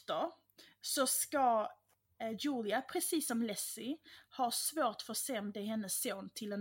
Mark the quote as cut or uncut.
uncut